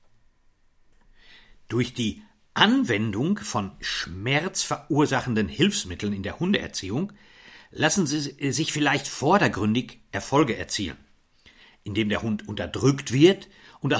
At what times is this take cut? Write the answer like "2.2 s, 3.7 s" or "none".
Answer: none